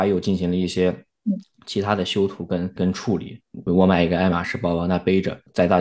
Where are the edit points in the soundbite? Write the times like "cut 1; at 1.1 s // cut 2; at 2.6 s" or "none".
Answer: cut 1; at 3.7 s